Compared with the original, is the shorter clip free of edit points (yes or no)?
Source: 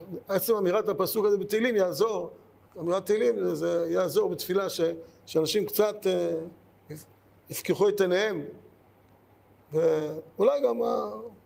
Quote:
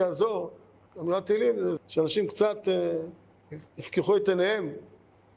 no